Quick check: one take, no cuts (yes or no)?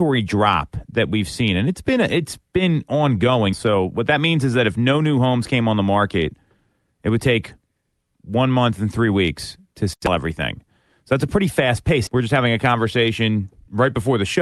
no